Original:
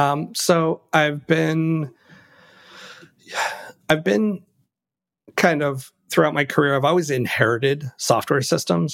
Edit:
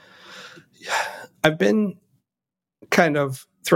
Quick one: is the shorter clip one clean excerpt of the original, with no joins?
yes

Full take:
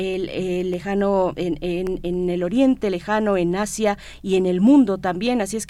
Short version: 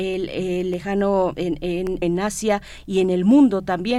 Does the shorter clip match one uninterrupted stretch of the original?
no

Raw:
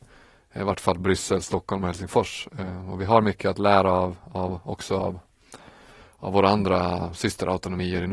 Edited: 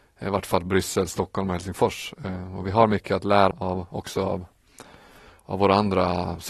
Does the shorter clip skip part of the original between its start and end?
yes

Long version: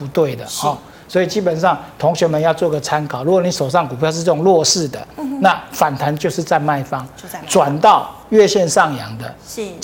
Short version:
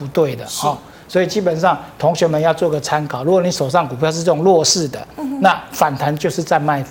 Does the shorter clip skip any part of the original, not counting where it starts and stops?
no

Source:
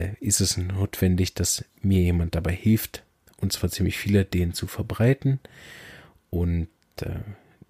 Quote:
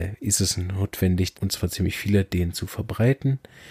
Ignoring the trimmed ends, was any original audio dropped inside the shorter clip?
yes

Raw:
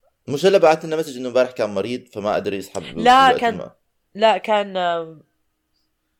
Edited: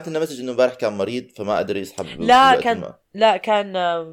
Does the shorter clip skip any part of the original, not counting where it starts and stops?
yes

